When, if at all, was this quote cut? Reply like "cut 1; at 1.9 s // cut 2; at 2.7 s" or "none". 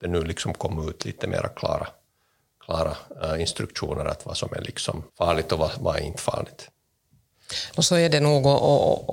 cut 1; at 5.1 s